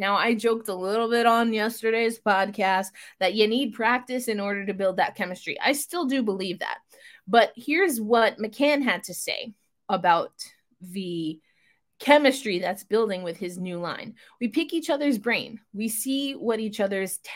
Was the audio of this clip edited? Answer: no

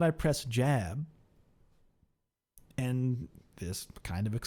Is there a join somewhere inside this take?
no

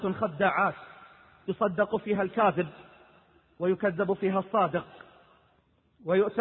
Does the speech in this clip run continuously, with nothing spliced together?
yes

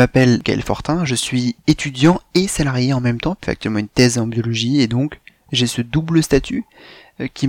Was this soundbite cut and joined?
no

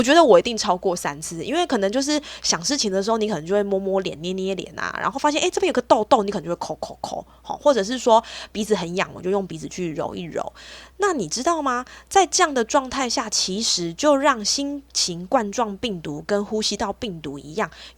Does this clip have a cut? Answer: no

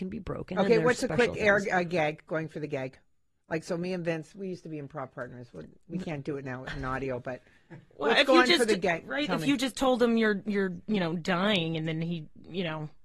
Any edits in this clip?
no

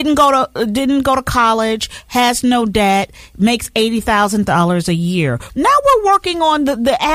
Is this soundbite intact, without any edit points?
no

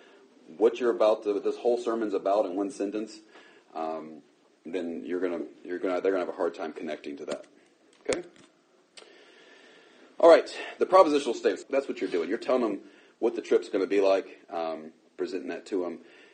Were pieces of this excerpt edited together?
yes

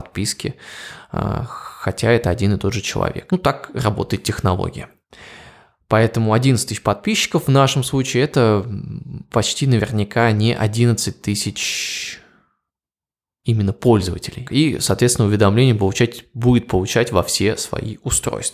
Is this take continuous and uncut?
no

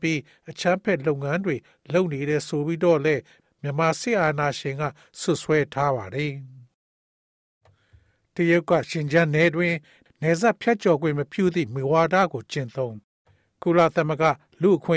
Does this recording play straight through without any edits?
yes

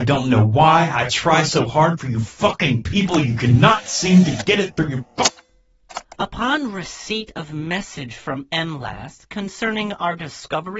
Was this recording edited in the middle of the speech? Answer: no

